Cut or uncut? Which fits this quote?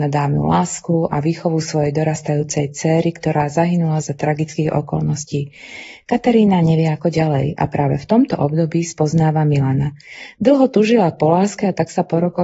uncut